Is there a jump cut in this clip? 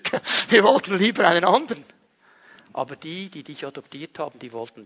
no; 0 cuts

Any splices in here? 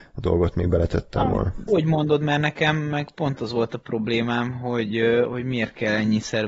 yes; 1 cut; at 1.7 s

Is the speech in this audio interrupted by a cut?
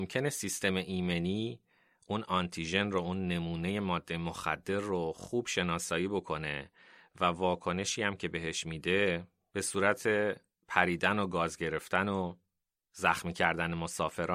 no; 0 cuts

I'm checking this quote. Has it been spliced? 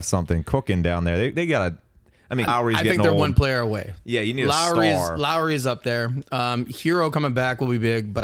yes; 1 cut; at 2.5 s

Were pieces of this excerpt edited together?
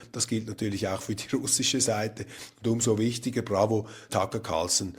yes; 1 cut; at 4.1 s

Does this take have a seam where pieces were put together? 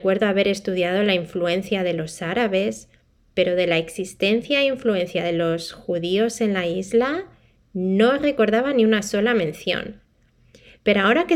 no; 0 cuts

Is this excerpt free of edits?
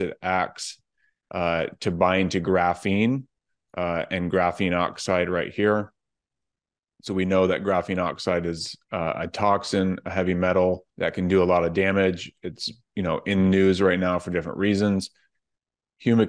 no; 1 cut; at 10.9 s

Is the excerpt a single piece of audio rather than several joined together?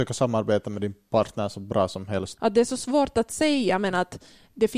no; 1 cut; at 2.4 s

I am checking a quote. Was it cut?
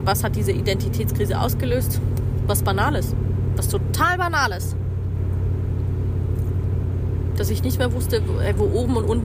no; 0 cuts

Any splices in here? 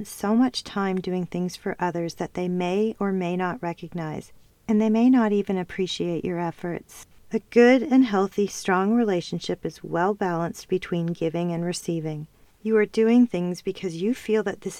yes; 2 cuts; at 7.2 s, 12.5 s

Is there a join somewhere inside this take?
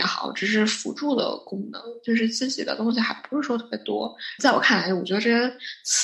yes; 1 cut; at 4.4 s

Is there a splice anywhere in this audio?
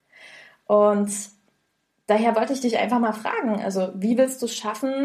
no; 0 cuts

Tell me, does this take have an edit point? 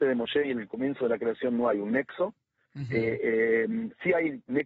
no; 0 cuts

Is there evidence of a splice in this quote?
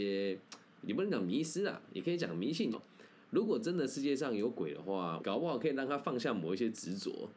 yes; 2 cuts; at 2.7 s, 5.2 s

